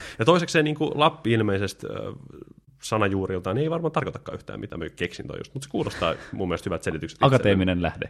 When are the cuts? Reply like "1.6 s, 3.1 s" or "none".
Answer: none